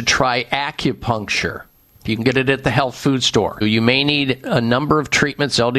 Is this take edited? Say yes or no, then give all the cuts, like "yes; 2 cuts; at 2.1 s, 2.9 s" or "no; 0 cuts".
yes; 2 cuts; at 2.0 s, 3.6 s